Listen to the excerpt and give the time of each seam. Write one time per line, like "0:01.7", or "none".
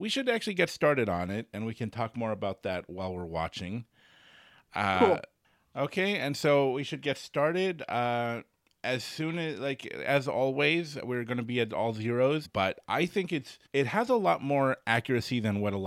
0:12.4
0:13.7